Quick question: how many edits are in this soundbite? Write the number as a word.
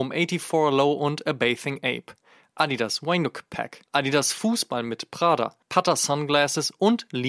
two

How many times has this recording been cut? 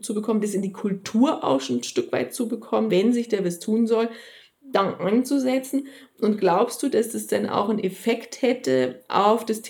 one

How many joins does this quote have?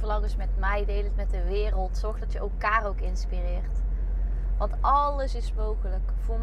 zero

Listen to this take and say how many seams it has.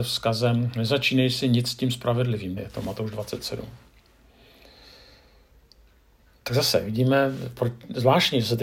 one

